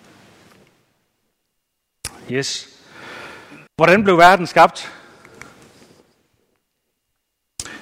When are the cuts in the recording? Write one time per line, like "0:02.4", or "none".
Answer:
0:03.7